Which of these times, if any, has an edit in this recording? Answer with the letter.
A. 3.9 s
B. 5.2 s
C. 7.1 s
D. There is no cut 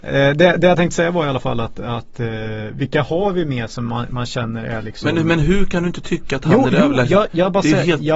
D